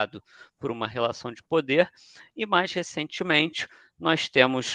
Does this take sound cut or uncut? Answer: uncut